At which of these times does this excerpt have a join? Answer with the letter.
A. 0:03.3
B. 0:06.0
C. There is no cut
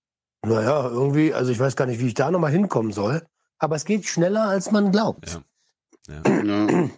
C